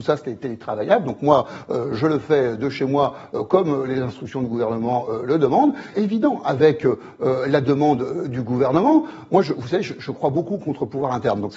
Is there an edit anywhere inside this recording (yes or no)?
yes